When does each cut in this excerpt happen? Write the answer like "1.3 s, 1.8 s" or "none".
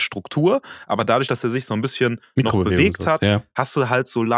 none